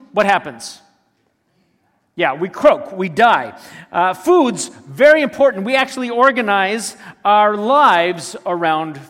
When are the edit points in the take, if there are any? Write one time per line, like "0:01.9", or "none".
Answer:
none